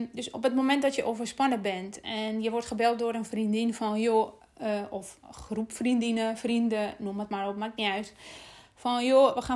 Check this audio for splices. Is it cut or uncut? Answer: uncut